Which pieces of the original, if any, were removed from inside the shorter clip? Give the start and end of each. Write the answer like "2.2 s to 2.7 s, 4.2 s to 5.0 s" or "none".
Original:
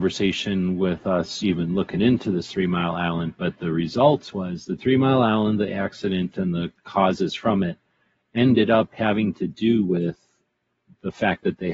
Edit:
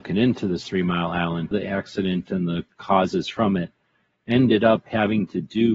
3.4 s to 5.6 s